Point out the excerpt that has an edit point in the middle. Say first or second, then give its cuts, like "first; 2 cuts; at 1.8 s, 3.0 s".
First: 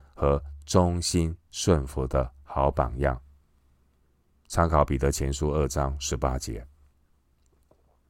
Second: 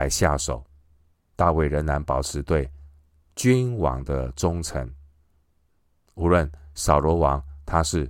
second; 1 cut; at 1.1 s